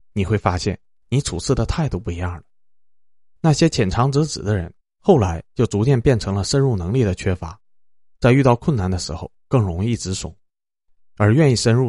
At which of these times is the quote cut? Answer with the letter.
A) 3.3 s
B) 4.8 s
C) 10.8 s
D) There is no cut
B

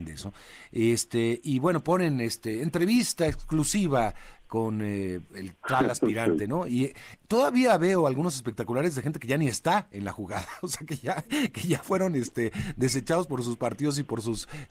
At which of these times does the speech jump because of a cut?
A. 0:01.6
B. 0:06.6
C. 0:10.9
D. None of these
D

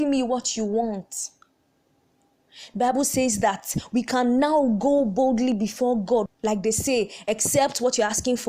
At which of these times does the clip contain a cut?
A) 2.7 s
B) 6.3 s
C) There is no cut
B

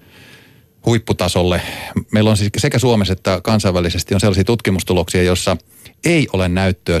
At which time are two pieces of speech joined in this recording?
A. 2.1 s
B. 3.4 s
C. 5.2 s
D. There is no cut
A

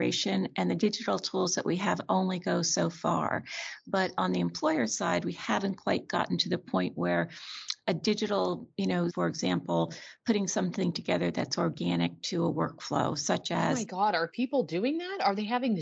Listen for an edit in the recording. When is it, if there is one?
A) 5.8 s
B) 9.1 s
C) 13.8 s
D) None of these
B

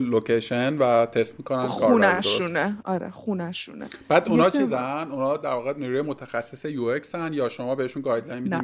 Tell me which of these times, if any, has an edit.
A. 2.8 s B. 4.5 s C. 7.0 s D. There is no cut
A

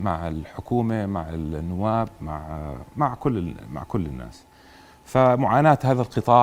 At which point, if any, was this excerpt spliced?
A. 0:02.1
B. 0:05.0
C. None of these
C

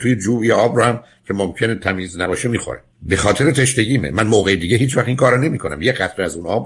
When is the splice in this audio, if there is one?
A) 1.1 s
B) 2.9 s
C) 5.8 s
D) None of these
B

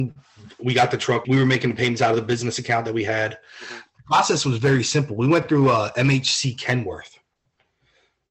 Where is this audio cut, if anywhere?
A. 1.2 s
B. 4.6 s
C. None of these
A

